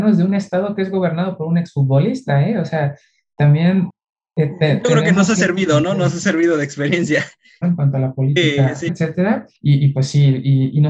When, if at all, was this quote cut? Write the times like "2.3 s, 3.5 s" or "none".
7.6 s, 8.9 s